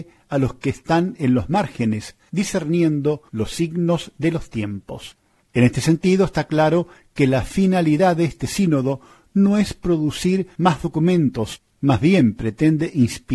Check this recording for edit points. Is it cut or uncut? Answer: cut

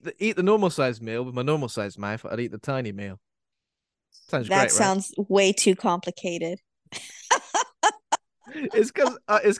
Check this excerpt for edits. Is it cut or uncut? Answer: cut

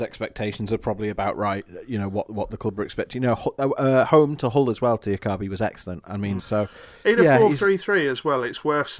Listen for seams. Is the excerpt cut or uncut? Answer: cut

